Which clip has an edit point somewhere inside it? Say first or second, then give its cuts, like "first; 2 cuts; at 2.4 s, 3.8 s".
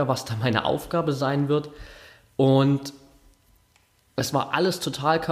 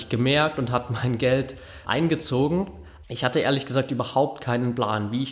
second; 2 cuts; at 1.8 s, 3.0 s